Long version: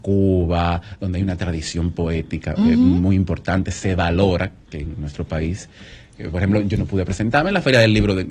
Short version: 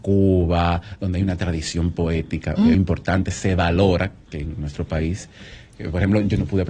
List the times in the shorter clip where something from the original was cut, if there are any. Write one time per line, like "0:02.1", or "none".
0:02.7